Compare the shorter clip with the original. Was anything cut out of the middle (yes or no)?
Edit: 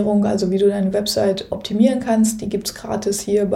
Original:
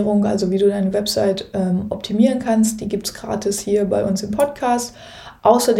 yes